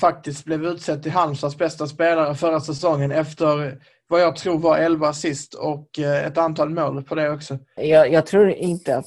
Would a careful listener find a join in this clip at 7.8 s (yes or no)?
yes